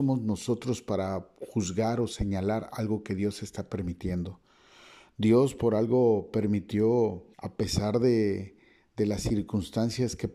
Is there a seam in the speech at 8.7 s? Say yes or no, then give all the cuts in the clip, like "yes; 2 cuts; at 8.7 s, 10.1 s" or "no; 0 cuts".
no; 1 cut; at 7.3 s